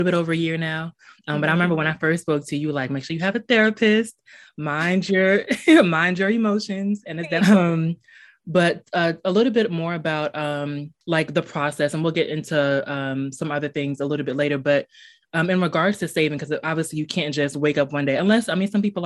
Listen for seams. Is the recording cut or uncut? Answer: cut